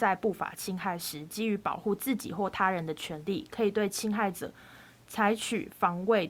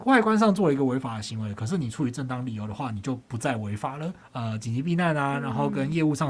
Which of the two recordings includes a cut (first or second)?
second